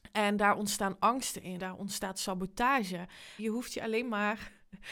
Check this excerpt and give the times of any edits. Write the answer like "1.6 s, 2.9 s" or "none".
1.6 s, 3.4 s